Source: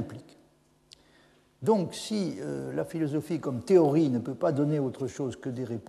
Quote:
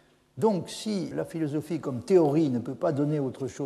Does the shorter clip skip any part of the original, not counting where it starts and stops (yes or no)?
yes